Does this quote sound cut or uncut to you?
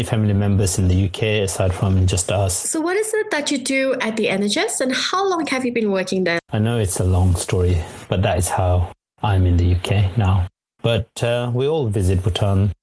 cut